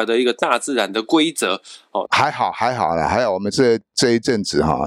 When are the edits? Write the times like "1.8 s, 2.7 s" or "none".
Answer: 2.1 s